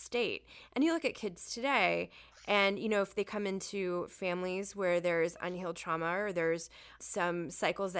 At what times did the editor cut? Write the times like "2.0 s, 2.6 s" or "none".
7.0 s